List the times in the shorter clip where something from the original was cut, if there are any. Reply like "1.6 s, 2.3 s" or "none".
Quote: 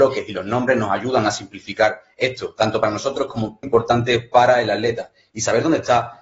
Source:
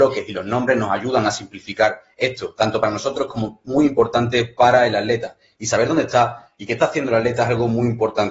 3.6 s